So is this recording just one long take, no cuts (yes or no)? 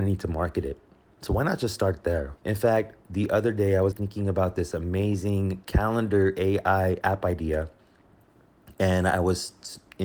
no